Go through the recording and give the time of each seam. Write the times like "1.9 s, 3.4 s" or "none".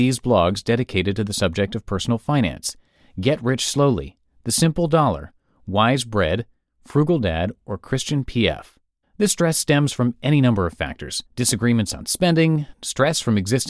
9.0 s, 11.3 s, 12.7 s